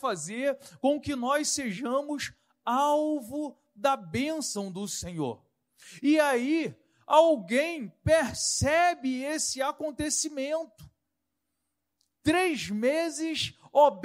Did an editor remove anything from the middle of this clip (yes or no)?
no